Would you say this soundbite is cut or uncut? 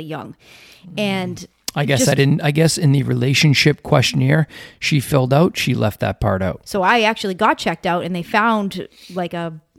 cut